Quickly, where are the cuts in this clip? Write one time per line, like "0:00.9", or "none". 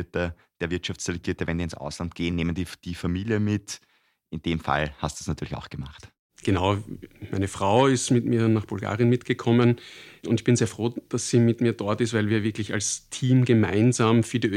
none